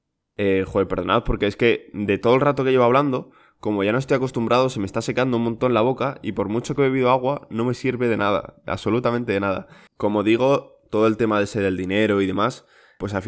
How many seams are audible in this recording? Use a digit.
1